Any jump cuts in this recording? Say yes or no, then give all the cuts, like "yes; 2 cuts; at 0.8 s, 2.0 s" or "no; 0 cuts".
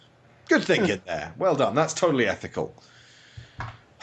no; 0 cuts